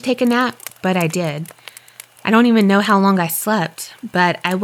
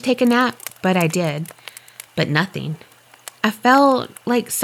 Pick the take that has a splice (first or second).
second